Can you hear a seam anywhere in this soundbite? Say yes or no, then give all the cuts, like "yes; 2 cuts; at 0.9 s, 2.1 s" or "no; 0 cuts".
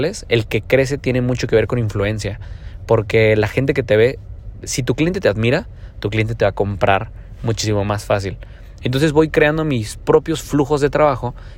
yes; 1 cut; at 8.8 s